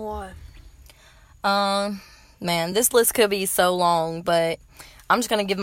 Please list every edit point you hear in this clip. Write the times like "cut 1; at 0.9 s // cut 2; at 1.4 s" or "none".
none